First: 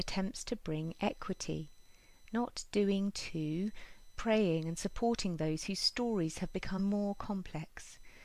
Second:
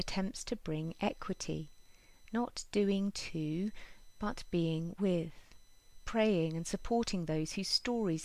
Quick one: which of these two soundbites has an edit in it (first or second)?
first